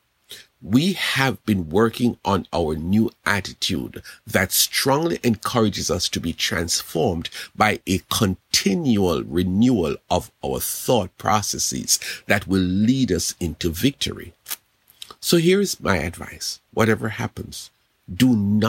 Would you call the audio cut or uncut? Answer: uncut